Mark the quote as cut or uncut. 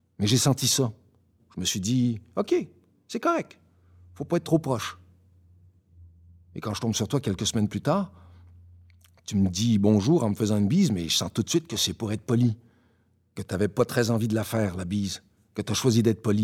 cut